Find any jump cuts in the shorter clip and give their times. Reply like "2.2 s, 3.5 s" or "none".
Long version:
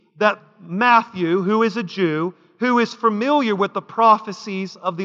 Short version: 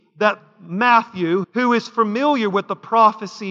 1.4 s